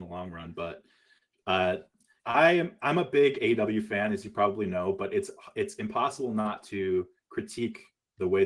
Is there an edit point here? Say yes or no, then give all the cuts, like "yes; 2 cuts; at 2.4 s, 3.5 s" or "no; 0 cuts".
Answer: yes; 1 cut; at 2.2 s